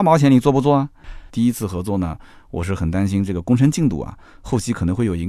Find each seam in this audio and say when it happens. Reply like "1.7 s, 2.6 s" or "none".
1.3 s